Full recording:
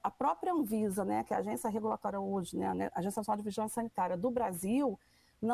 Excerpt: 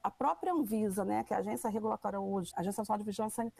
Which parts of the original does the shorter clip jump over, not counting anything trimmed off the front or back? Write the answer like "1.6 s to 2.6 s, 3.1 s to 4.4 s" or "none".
2.5 s to 2.9 s